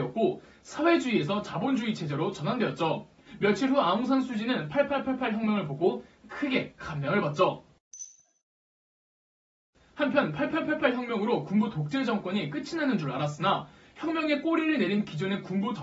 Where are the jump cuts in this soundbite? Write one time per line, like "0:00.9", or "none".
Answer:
0:03.2